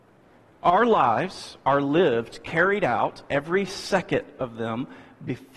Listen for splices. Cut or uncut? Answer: uncut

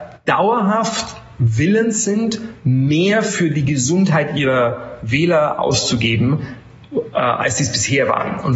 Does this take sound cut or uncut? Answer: uncut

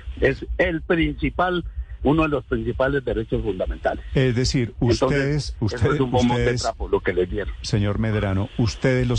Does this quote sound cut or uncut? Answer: uncut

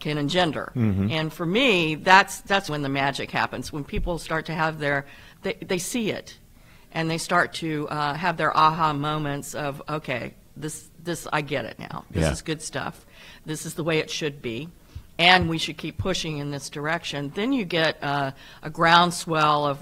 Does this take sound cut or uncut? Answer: cut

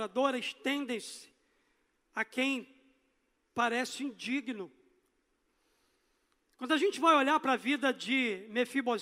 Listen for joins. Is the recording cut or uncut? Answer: uncut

